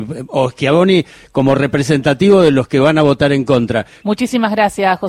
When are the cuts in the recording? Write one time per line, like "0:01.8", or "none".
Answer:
0:04.0